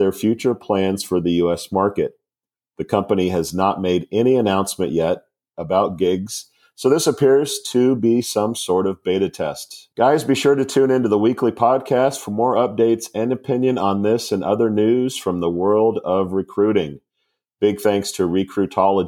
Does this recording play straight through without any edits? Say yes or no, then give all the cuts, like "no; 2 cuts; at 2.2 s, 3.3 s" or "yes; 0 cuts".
no; 1 cut; at 9.9 s